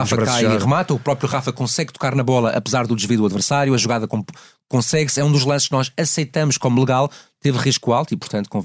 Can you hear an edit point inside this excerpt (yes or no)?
no